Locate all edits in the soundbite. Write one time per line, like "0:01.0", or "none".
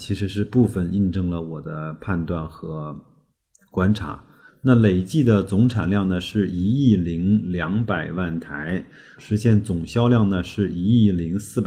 0:04.5
0:09.2